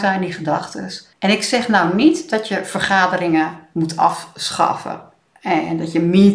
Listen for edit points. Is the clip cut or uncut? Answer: cut